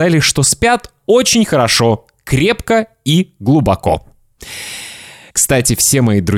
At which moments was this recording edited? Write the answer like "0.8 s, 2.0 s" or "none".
5.3 s